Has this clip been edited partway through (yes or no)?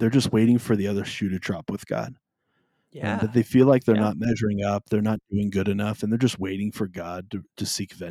no